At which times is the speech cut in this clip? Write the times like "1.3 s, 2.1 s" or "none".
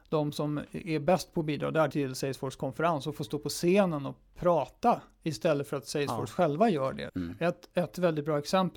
1.9 s, 7.1 s